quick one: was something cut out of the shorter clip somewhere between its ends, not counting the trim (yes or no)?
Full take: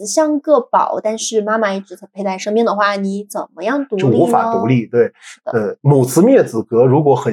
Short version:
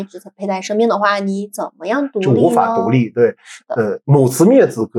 no